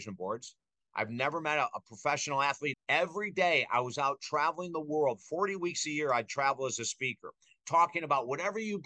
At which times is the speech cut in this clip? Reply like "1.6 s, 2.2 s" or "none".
2.7 s